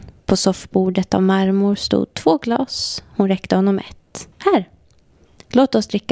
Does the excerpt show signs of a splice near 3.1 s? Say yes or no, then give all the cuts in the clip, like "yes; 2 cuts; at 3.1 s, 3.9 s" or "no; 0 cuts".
no; 1 cut; at 4.3 s